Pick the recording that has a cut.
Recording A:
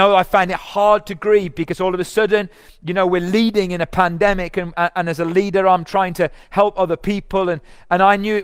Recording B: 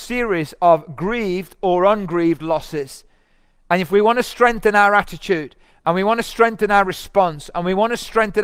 A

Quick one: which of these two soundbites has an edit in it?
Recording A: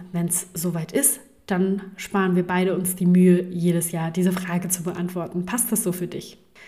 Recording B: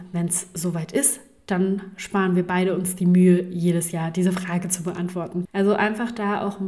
B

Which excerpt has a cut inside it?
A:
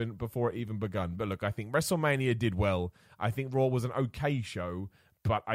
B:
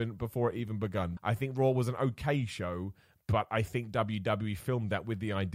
B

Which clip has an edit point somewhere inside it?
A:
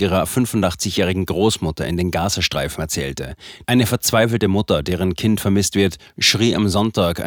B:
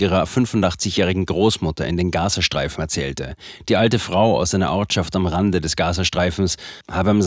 A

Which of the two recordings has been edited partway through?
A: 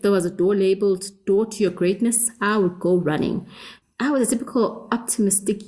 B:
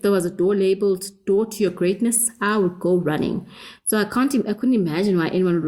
A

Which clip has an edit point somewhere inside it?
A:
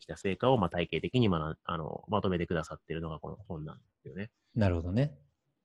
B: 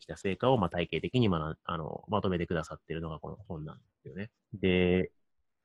B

